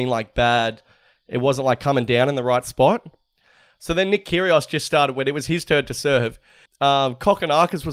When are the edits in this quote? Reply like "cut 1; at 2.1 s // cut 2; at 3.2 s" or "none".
cut 1; at 6.7 s